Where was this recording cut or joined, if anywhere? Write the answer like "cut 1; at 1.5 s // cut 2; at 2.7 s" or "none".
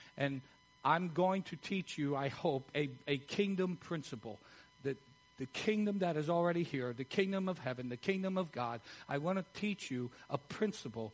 cut 1; at 2.7 s

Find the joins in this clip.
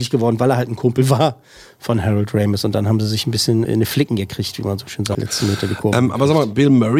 cut 1; at 3.6 s // cut 2; at 5.1 s

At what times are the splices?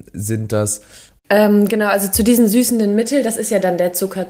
cut 1; at 1.2 s

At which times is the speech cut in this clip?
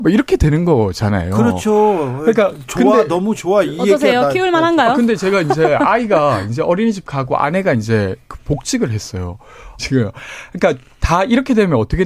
cut 1; at 9.8 s

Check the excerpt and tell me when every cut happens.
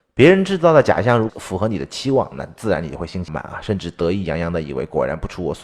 cut 1; at 1.3 s // cut 2; at 3.3 s

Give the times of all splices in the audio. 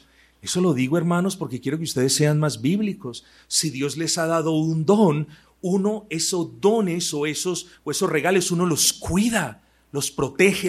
none

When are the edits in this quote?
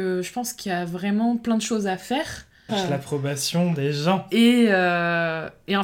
cut 1; at 2.7 s // cut 2; at 4.3 s

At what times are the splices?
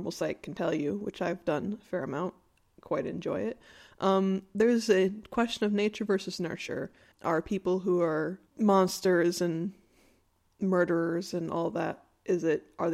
cut 1; at 7.1 s // cut 2; at 8.5 s

